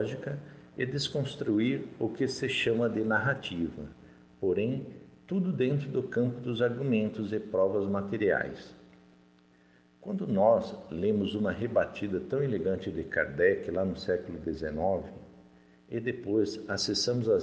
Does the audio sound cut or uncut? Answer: uncut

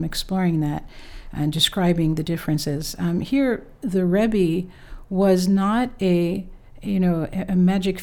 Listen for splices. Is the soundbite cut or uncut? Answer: uncut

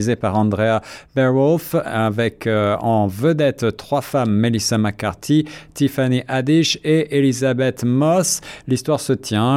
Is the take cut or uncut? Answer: cut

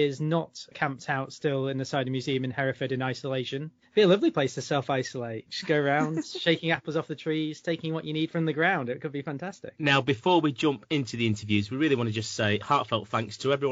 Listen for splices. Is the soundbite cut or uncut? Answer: uncut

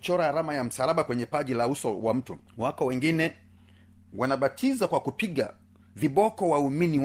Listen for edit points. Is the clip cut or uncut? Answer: cut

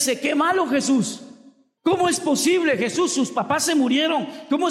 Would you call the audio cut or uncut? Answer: uncut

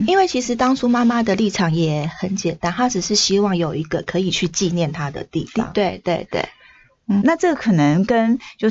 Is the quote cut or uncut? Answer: cut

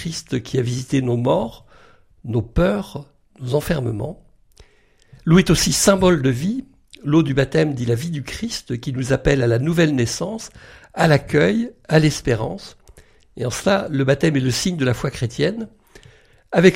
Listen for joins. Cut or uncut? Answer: uncut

